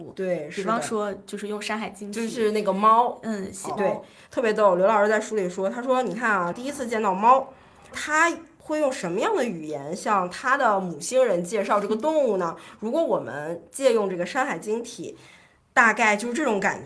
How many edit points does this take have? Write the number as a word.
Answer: three